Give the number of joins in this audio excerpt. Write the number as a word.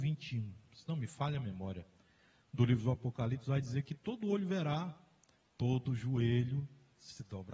zero